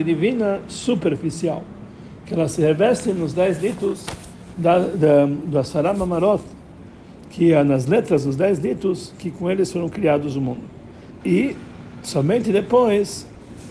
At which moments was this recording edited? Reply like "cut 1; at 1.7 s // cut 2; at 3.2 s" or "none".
cut 1; at 11.2 s